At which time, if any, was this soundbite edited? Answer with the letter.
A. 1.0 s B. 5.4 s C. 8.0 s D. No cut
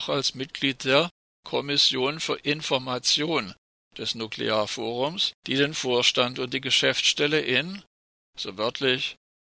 B